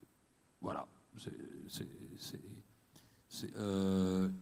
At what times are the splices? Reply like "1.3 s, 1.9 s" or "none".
3.5 s